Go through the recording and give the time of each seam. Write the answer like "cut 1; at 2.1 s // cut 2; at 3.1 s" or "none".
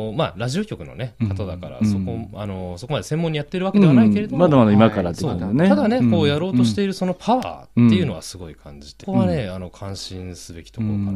cut 1; at 9.0 s